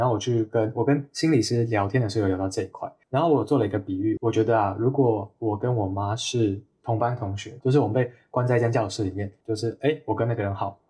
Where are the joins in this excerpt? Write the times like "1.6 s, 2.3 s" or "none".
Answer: 4.2 s, 7.6 s, 9.4 s